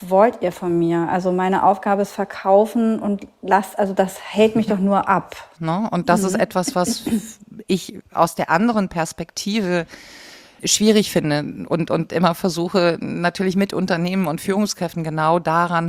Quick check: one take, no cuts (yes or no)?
no